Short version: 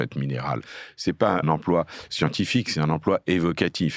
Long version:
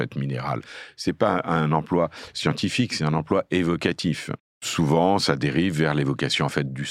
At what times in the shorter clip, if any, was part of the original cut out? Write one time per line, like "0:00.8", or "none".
0:01.4